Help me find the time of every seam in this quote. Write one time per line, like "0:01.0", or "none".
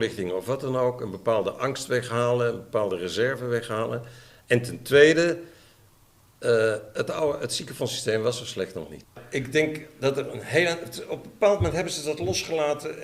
none